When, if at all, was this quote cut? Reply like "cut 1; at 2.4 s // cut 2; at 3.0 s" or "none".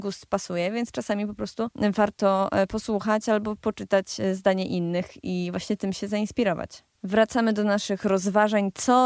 cut 1; at 6.9 s